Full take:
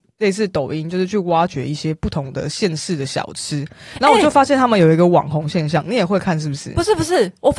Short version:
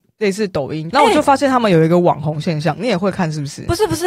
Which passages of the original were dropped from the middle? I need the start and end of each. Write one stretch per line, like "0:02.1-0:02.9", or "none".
0:00.9-0:04.0